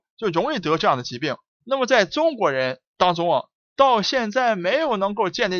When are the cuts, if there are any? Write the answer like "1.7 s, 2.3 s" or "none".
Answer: 1.5 s

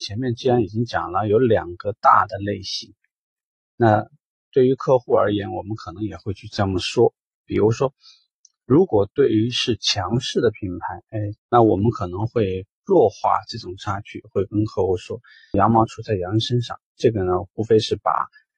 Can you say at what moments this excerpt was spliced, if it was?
11.4 s, 15.5 s

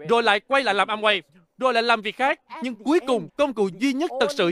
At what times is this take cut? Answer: 3.3 s

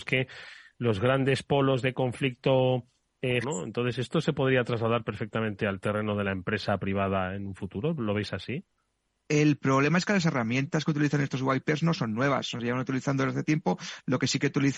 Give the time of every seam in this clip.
3.4 s

